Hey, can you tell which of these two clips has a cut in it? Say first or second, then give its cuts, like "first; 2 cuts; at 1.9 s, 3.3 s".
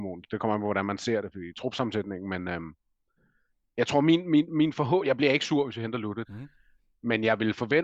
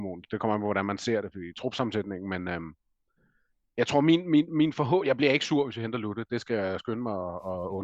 first; 1 cut; at 6.2 s